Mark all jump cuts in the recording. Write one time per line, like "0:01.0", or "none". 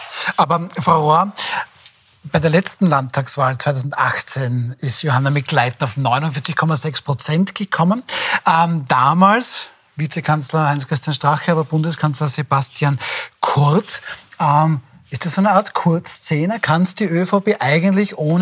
none